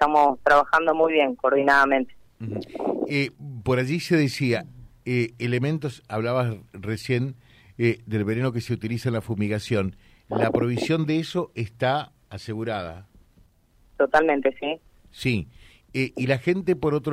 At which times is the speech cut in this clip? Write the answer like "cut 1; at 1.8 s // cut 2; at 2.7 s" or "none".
none